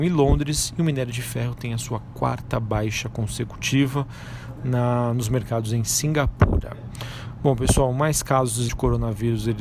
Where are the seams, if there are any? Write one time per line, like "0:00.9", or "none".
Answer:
0:08.7